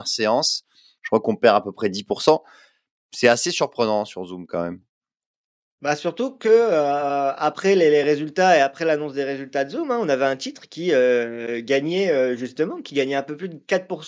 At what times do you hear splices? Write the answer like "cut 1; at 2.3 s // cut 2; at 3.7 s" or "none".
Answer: none